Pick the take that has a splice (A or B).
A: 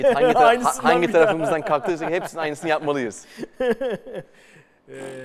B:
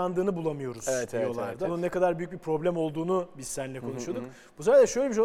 B